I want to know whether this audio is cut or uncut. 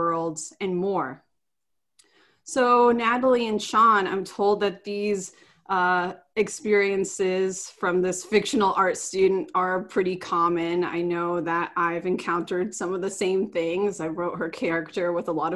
uncut